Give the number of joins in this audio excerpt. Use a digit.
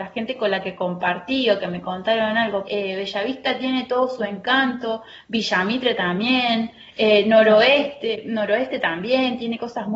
1